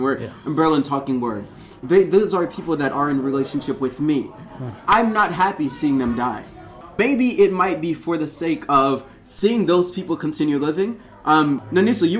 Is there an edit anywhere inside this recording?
yes; 1 cut; at 1.8 s

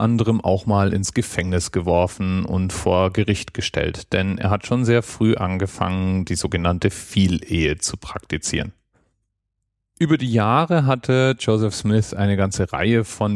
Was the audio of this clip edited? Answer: no; 0 cuts

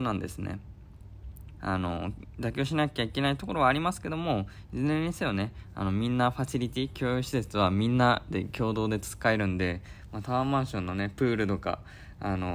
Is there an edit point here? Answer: yes; 1 cut; at 1.6 s

